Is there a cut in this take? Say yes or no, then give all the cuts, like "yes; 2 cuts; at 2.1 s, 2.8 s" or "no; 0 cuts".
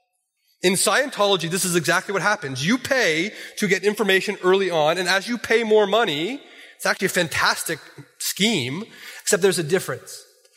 yes; 1 cut; at 9.2 s